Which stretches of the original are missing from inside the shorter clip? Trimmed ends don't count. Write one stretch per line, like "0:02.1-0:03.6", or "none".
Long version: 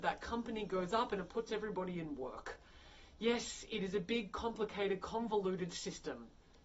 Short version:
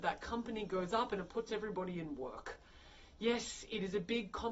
none

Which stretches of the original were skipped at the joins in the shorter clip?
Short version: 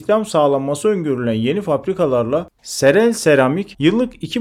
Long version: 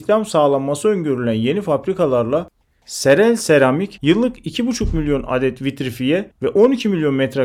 0:02.6-0:02.8

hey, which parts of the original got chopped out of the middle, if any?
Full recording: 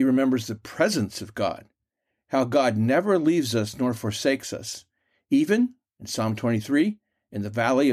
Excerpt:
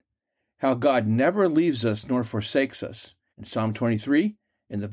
0:05.0-0:05.9

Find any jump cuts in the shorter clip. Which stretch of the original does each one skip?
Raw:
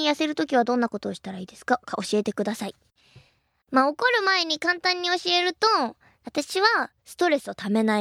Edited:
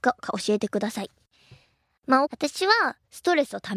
0:03.9-0:06.2

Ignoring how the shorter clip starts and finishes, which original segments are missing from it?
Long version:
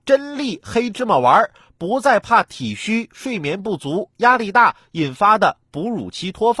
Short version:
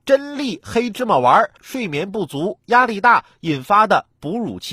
0:01.6-0:03.1

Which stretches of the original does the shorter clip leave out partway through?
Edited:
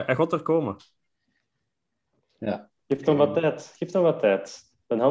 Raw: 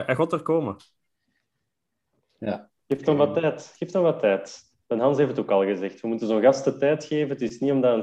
none

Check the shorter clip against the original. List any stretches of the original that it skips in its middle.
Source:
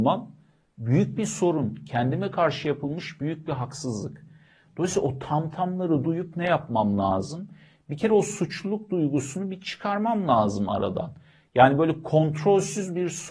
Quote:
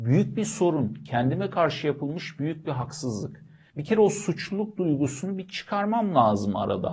0:04.5-0:07.8

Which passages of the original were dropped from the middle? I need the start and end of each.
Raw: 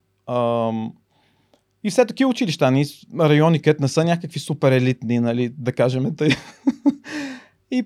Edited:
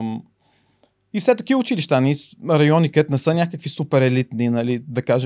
none

